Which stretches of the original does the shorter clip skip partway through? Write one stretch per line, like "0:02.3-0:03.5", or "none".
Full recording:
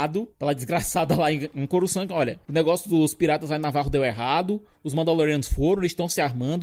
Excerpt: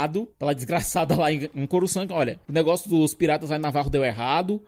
none